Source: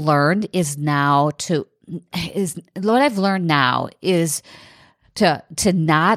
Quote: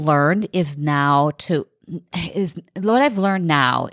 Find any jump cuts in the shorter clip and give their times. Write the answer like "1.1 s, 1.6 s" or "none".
none